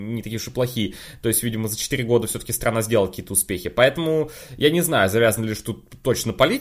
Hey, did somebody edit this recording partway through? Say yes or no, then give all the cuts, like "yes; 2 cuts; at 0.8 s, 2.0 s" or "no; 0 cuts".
no; 0 cuts